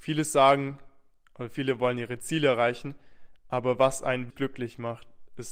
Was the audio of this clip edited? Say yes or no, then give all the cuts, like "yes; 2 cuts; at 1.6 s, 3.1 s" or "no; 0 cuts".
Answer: yes; 1 cut; at 4.3 s